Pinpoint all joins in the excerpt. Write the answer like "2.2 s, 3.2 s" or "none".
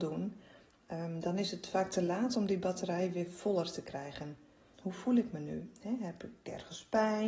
4.7 s